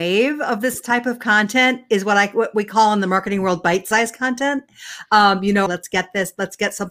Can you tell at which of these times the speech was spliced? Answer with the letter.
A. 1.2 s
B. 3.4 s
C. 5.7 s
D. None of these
C